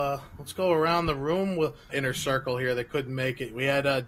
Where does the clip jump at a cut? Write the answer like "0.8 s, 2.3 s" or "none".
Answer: 1.9 s